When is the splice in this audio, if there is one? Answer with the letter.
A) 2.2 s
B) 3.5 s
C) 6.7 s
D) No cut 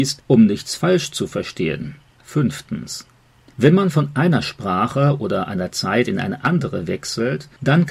A